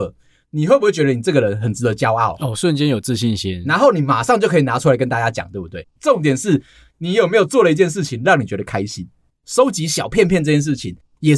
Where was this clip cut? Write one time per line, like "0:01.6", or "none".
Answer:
0:06.0